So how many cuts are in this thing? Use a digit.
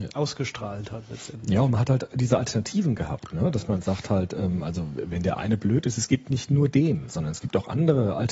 0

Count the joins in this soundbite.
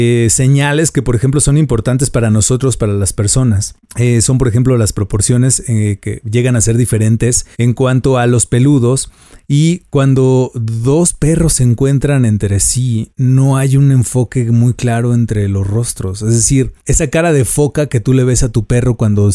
1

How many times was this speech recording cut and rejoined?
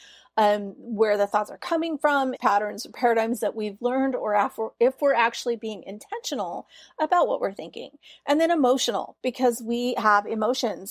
1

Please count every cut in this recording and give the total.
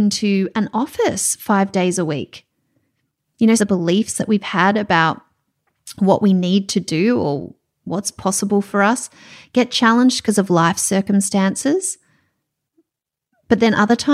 1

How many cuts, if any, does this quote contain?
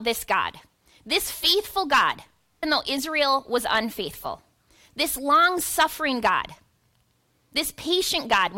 1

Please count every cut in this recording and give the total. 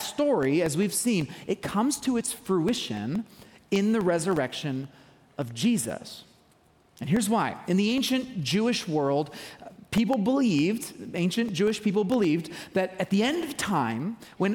0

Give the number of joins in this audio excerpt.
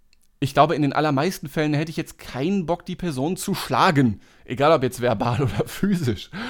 0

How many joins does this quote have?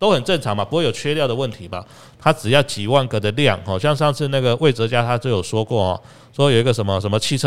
1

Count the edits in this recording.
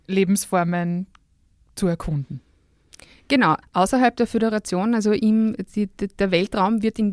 1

